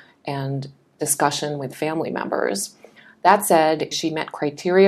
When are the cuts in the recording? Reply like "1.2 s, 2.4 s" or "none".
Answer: 3.9 s